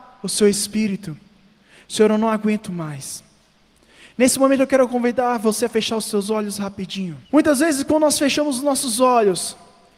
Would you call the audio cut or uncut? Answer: cut